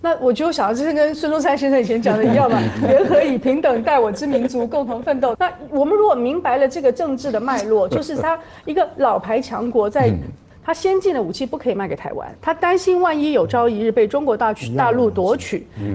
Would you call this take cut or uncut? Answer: cut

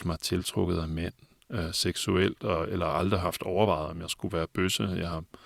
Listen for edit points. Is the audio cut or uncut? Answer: uncut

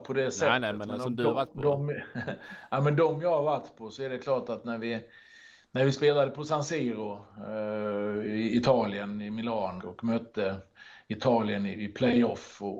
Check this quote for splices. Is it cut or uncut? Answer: cut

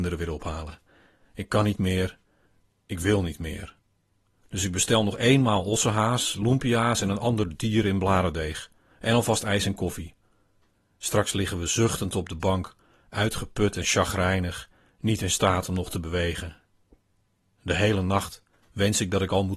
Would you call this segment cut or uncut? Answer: uncut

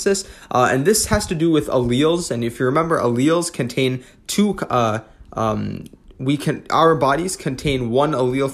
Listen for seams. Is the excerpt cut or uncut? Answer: uncut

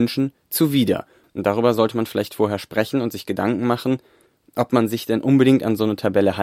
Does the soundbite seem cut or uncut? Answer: cut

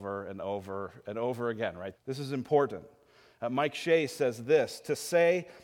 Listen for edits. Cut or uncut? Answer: cut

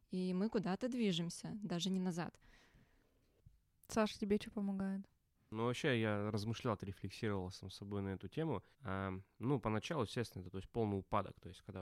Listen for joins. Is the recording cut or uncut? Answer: cut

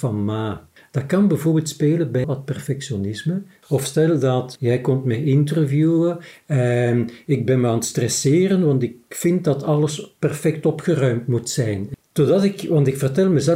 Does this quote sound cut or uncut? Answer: cut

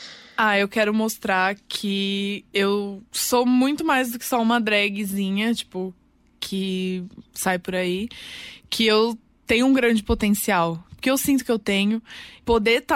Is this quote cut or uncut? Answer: uncut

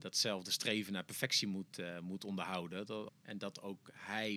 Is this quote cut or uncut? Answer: cut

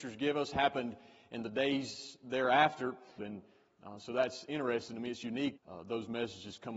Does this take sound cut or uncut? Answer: cut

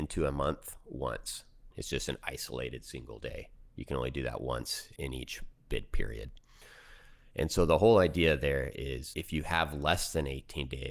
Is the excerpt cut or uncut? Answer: cut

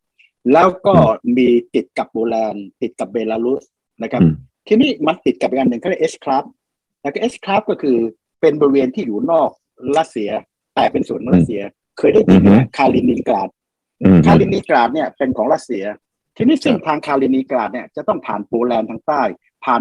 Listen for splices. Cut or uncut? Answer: uncut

